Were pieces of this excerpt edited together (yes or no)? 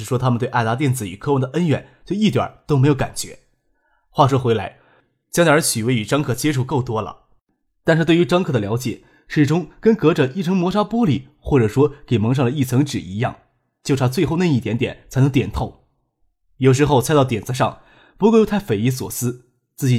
no